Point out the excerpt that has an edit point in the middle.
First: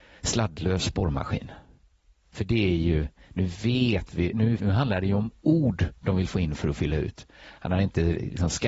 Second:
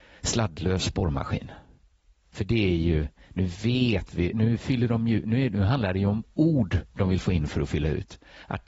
first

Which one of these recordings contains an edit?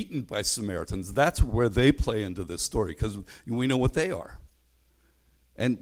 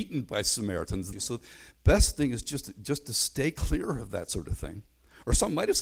second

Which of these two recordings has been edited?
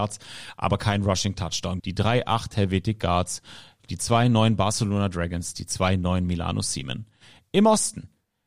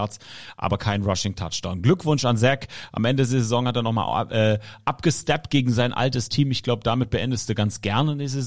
first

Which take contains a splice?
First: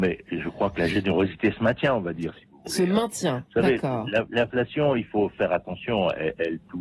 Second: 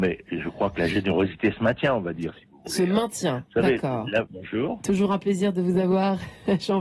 second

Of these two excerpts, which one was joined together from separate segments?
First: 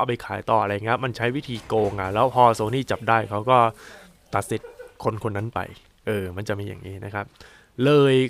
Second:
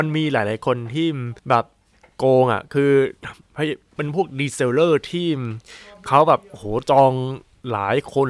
second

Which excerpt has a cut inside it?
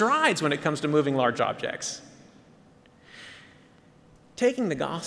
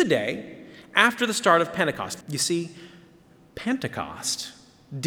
second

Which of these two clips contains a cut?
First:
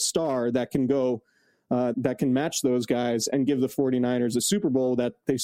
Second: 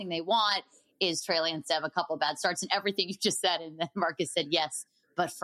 first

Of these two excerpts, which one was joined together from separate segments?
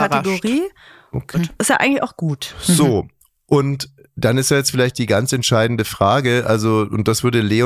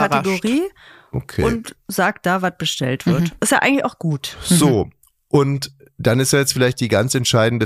first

